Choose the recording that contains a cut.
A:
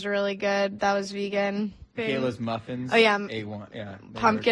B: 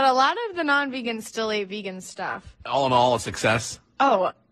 A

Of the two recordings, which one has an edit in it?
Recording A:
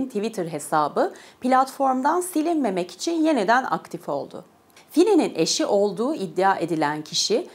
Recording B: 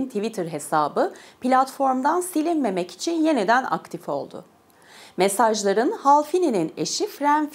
A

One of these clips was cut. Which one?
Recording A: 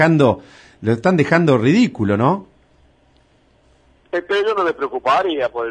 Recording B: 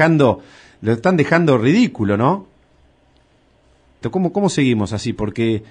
B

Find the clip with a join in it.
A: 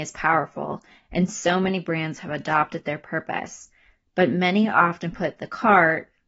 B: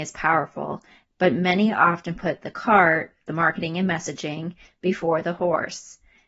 B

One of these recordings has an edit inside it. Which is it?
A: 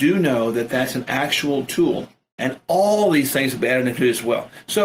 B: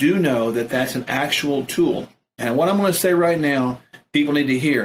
A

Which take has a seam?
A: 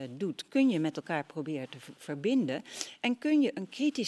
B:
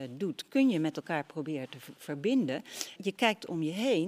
B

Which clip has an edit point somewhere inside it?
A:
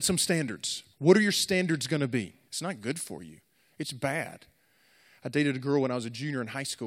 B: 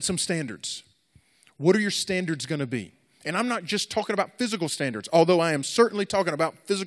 A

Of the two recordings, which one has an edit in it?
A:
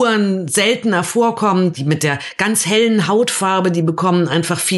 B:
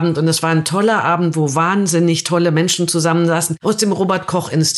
B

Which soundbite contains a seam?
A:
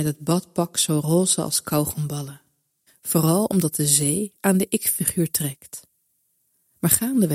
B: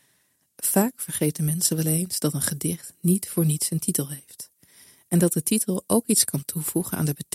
A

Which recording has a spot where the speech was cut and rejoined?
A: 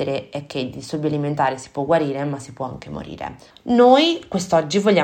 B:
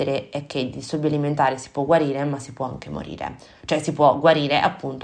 A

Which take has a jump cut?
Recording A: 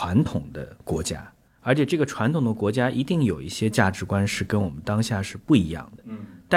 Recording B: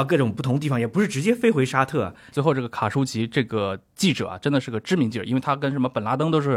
B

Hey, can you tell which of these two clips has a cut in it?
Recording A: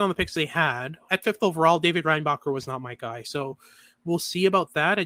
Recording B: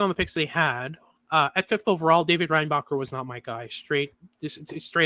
A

